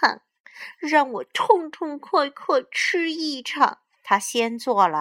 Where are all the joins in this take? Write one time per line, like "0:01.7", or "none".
0:04.0